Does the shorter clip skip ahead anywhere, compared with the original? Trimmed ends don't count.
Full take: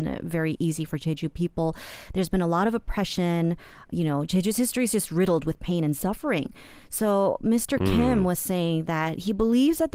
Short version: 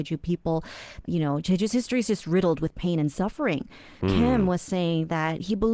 yes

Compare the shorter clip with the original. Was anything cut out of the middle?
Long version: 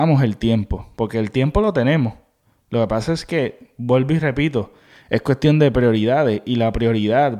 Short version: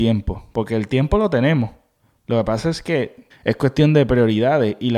yes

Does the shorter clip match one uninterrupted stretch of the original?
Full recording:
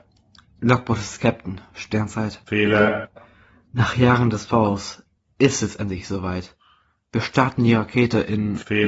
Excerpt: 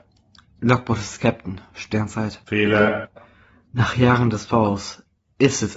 yes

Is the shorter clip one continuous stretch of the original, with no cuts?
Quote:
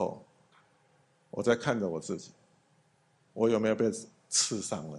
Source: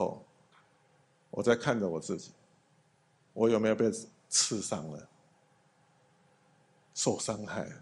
yes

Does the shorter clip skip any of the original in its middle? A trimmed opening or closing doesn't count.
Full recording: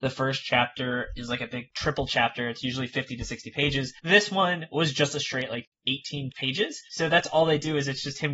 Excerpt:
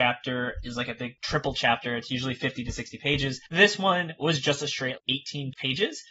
yes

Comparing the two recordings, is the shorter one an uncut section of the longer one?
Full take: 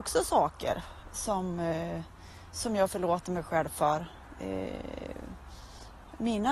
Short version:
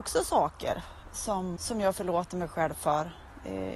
no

